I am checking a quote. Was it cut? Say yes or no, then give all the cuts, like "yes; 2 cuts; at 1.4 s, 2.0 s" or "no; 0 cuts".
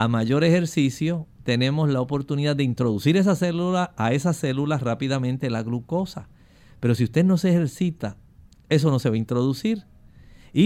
no; 0 cuts